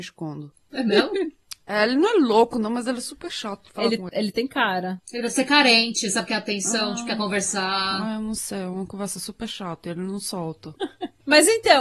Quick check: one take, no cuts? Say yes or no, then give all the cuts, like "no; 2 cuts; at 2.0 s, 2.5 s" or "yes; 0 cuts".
yes; 0 cuts